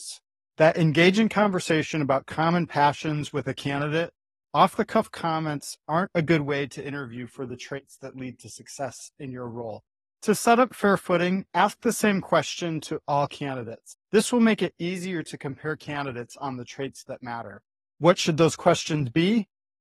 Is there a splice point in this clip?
yes; 1 cut; at 4.4 s

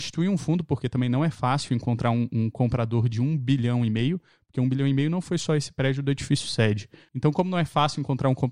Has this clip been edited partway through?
yes; 1 cut; at 7.1 s

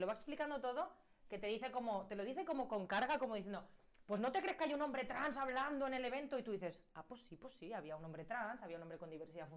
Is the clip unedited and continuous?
yes; 0 cuts

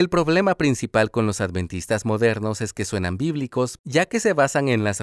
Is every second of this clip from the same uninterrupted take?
no; 1 cut; at 3.8 s

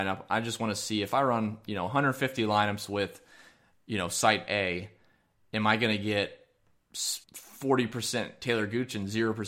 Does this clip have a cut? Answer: yes; 1 cut; at 7.2 s

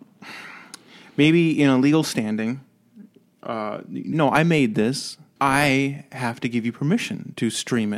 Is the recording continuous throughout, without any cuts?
no; 2 cuts; at 4.1 s, 5.4 s

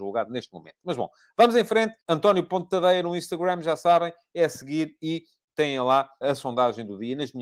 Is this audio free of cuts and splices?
no; 2 cuts; at 2.0 s, 6.2 s

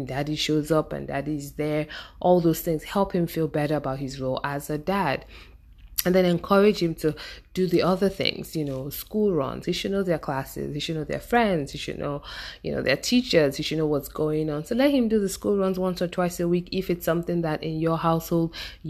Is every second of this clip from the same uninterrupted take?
no; 1 cut; at 9.6 s

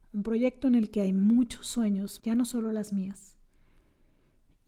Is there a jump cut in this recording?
yes; 1 cut; at 2.2 s

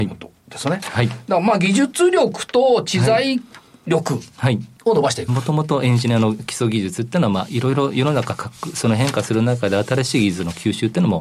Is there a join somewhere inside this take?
yes; 1 cut; at 5.3 s

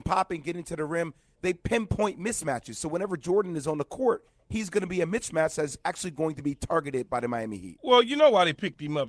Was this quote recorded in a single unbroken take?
yes; 0 cuts

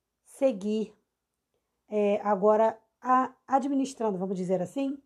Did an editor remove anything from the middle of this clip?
no; 0 cuts

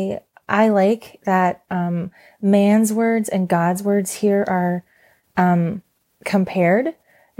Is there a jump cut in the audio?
no; 0 cuts

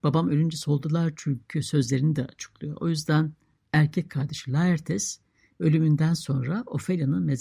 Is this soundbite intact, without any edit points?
yes; 0 cuts

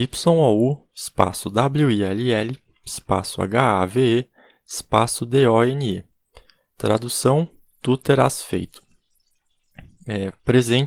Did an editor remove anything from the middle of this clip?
no; 0 cuts

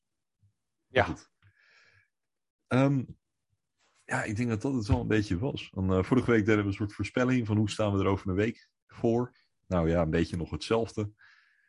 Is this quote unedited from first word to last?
yes; 0 cuts

